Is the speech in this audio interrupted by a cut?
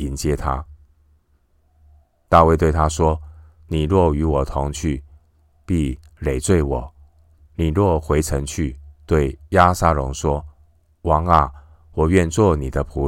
no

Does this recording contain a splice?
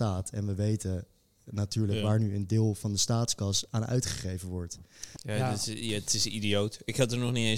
yes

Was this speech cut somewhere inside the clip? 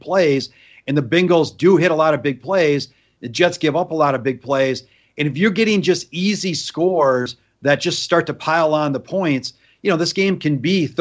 no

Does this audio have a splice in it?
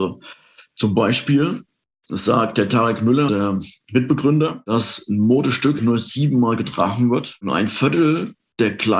yes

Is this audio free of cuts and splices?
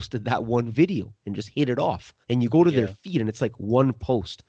no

